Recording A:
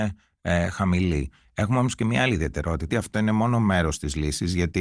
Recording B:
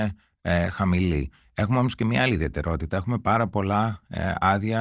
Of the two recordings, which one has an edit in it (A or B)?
A